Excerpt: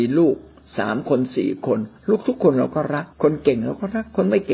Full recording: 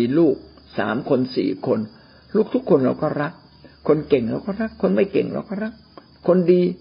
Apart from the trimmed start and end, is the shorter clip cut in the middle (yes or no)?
yes